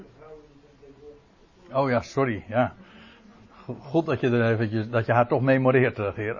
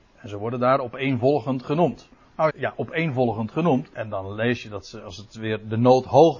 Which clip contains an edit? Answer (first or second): second